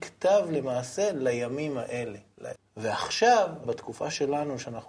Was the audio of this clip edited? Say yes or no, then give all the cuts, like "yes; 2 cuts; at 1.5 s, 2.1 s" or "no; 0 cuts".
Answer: yes; 2 cuts; at 2.6 s, 3.6 s